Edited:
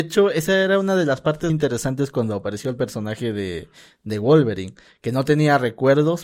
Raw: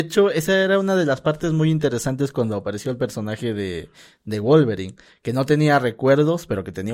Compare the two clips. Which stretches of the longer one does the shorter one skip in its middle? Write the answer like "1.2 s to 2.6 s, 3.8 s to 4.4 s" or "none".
1.5 s to 1.7 s